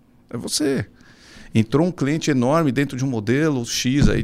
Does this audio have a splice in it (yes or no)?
no